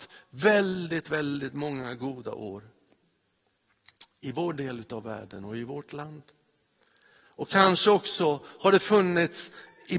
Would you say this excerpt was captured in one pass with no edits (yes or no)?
no